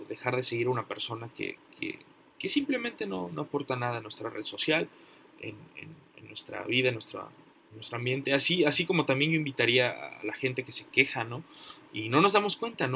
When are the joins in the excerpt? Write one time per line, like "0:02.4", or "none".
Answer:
0:11.9